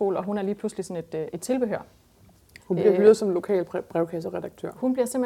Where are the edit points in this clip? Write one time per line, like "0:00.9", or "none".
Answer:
0:02.6